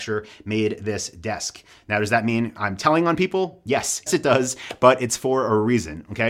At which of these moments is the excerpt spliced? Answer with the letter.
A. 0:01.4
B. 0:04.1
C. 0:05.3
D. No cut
B